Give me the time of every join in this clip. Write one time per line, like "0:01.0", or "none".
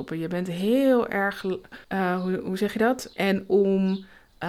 0:01.8
0:03.1